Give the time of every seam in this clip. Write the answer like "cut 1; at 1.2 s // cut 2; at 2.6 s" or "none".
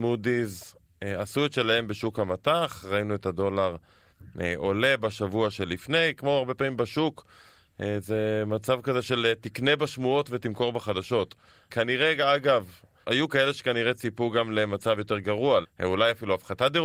cut 1; at 11.7 s // cut 2; at 13.0 s // cut 3; at 15.6 s